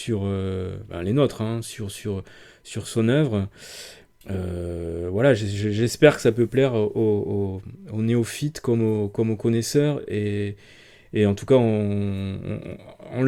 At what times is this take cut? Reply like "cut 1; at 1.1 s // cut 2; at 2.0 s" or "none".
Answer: none